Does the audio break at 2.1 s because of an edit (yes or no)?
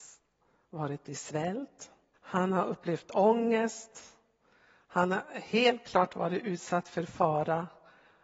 yes